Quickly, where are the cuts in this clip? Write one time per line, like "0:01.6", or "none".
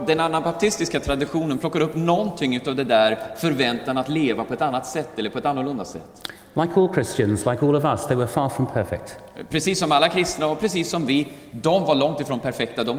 none